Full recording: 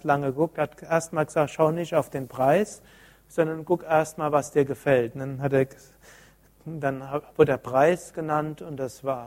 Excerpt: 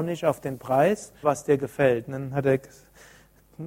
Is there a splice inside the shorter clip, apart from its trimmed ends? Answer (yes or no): yes